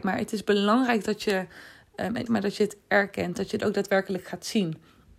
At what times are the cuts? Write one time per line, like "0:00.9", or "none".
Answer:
0:02.3